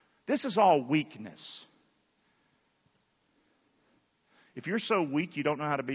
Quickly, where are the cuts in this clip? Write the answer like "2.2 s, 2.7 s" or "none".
none